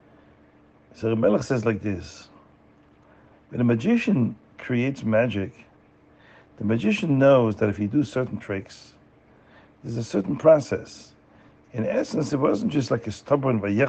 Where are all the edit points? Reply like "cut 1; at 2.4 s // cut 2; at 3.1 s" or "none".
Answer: cut 1; at 11.6 s